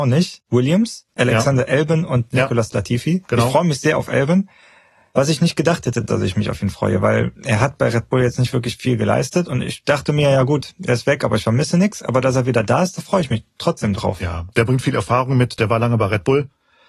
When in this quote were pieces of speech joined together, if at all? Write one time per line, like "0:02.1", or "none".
none